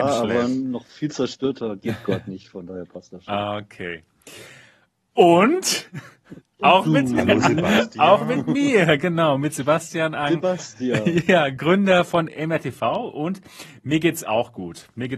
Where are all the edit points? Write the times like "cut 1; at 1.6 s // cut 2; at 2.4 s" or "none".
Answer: none